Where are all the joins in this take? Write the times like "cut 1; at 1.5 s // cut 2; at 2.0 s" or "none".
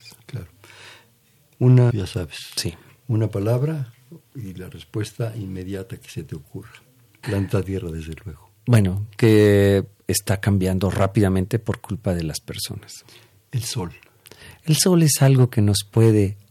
cut 1; at 1.9 s // cut 2; at 7.2 s